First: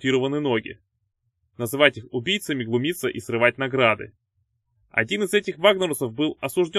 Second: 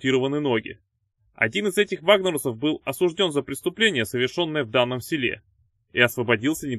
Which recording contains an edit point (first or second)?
second